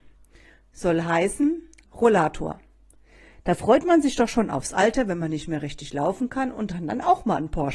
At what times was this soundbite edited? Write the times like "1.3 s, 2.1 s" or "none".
1.8 s